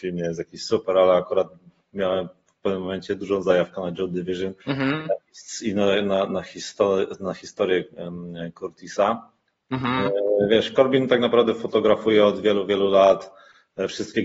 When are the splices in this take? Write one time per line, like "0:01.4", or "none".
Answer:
0:04.6